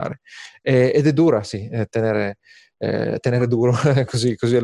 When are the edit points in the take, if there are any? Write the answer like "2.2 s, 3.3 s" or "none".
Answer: 1.9 s